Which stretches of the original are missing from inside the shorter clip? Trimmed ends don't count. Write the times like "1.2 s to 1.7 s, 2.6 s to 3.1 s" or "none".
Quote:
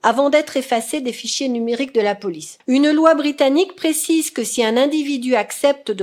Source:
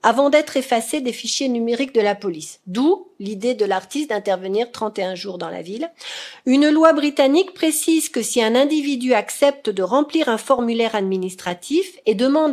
2.6 s to 6.4 s